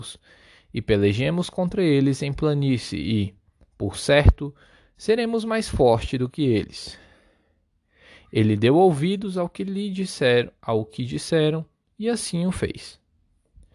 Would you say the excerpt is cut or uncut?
uncut